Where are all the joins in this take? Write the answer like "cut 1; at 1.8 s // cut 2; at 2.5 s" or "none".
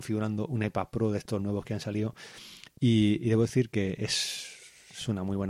none